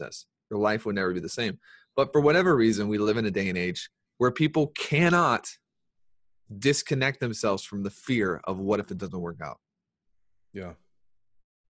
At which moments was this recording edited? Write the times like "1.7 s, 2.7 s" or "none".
none